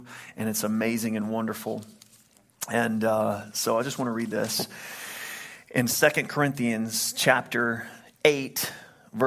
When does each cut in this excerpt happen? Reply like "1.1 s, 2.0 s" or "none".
none